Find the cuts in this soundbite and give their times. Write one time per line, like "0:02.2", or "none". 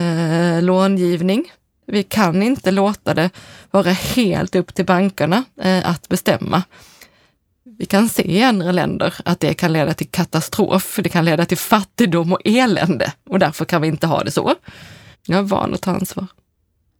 0:15.1